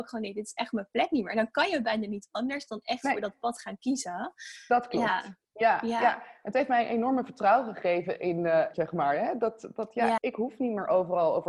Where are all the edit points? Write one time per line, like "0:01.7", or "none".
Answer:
0:08.7
0:10.2